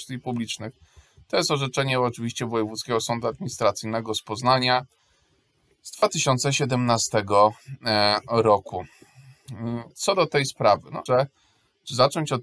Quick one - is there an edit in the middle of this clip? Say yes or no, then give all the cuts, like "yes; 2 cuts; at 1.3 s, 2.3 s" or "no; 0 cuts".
yes; 2 cuts; at 9.9 s, 11.1 s